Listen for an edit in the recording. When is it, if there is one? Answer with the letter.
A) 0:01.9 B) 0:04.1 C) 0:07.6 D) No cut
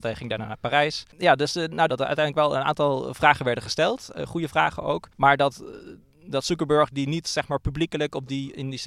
A